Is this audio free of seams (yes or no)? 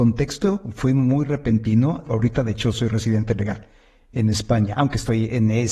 no